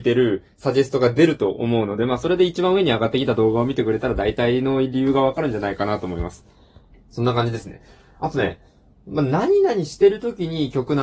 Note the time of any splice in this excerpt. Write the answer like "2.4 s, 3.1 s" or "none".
none